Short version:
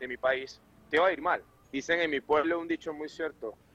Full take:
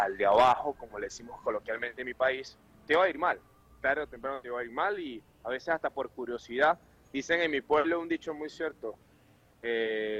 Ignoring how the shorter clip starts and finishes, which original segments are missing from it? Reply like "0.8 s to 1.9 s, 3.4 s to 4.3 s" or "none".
3.6 s to 7.0 s